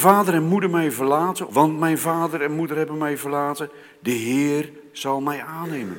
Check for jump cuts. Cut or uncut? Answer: cut